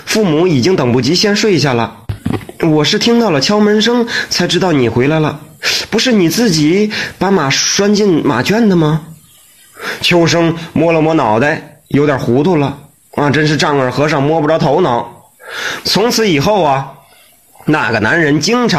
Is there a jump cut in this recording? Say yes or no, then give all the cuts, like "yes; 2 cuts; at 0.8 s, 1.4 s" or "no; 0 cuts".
yes; 1 cut; at 15.8 s